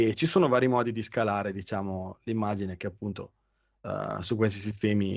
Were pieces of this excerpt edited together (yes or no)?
no